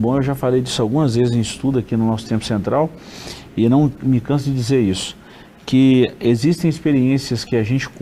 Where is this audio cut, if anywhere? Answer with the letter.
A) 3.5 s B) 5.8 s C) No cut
C